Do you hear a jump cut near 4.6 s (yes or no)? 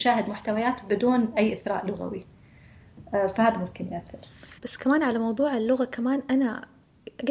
yes